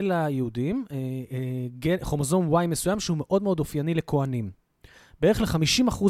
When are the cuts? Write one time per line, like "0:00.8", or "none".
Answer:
none

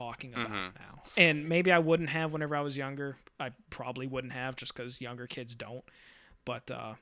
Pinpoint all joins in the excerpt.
none

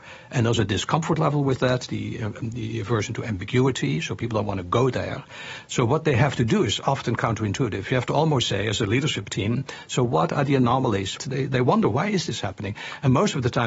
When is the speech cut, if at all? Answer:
0:11.2

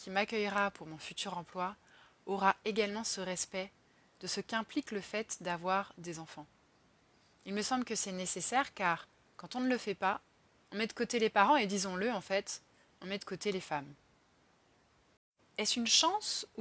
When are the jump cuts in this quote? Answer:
0:15.4

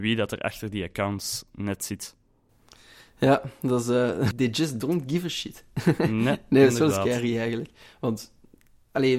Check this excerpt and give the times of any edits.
0:04.3

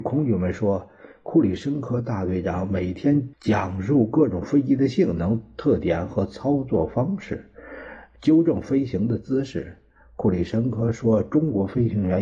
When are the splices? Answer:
0:03.3

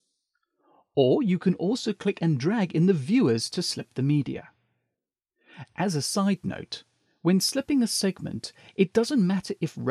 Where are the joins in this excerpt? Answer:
none

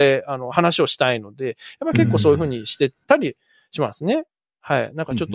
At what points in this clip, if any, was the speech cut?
none

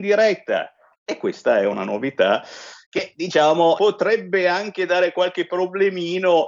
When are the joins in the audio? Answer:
0:00.9
0:03.8

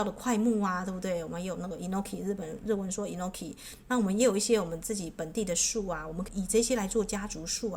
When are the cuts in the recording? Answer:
0:06.3

